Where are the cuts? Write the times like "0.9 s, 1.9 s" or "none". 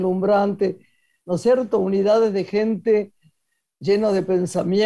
1.2 s